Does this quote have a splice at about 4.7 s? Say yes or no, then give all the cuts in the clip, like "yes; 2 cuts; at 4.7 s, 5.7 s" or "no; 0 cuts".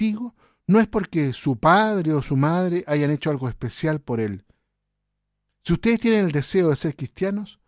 no; 0 cuts